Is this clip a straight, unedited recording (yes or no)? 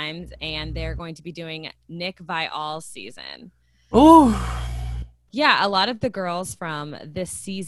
no